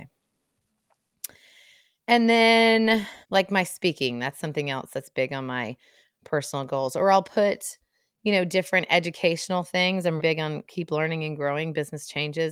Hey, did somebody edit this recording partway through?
yes; 2 cuts; at 3.2 s, 10.2 s

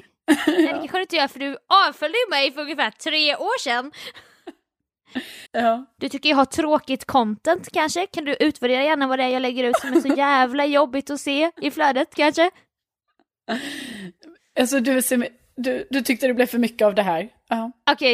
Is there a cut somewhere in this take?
yes; 1 cut; at 5.5 s

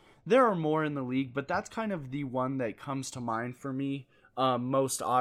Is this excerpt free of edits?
yes; 0 cuts

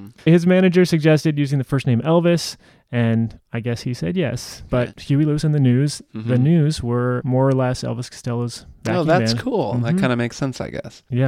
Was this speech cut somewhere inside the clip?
yes; 1 cut; at 4.7 s

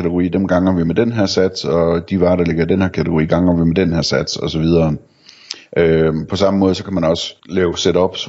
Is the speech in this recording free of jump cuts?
no; 1 cut; at 7.4 s

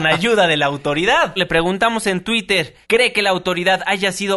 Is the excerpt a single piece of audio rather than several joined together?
no; 2 cuts; at 1.4 s, 2.8 s

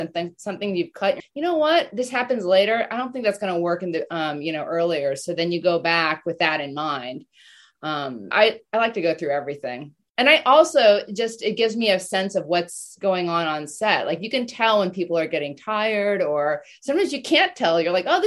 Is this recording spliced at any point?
yes; 2 cuts; at 1.2 s, 8.3 s

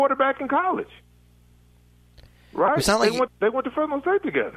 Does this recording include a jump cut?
yes; 1 cut; at 3.3 s

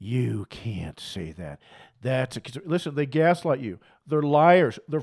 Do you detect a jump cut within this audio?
no; 0 cuts

